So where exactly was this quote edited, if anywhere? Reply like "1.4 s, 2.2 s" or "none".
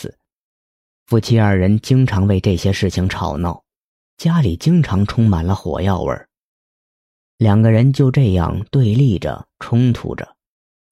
none